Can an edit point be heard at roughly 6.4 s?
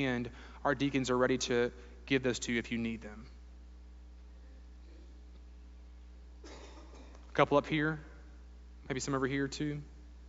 no; 1 cut; at 8.8 s

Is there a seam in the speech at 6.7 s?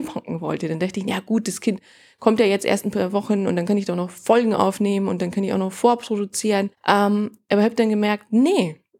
yes; 1 cut; at 6.7 s

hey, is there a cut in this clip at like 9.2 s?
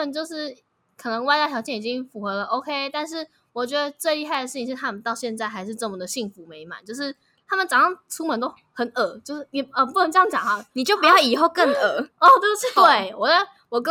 no; 1 cut; at 12.8 s

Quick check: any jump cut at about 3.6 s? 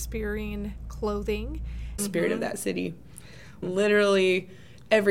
yes; 2 cuts; at 2.0 s, 3.6 s

